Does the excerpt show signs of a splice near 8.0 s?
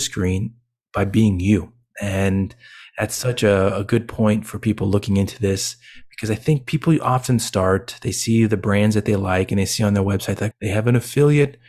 no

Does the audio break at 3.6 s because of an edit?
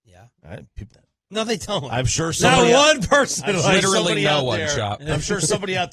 no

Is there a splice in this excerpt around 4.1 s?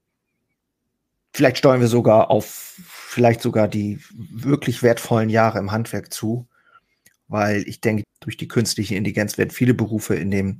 yes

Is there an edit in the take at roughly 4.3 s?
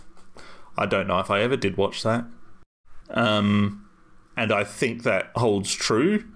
no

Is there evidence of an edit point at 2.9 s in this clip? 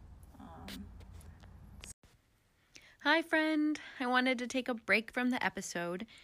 no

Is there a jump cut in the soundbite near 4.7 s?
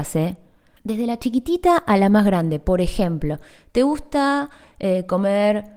no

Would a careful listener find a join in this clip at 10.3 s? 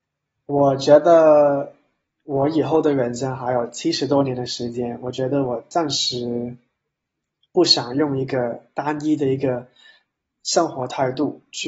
no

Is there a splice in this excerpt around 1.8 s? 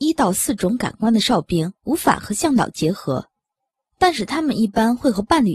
yes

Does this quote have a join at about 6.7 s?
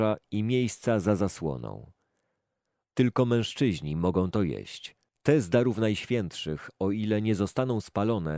no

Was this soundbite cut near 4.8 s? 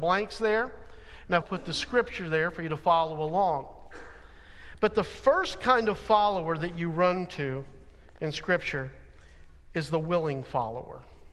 no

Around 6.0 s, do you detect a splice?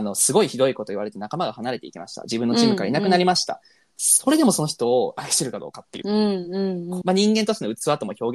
yes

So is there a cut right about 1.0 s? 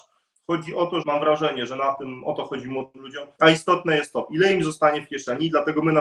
yes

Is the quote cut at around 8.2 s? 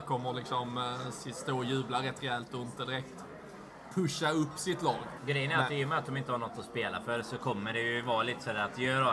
no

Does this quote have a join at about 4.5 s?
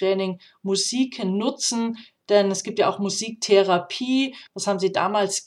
yes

